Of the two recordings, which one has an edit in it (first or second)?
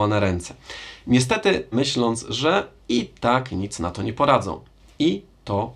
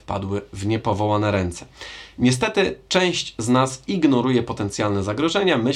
first